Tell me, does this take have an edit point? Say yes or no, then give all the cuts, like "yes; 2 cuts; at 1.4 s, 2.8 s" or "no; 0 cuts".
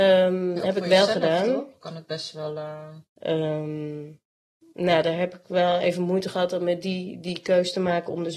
yes; 1 cut; at 3.1 s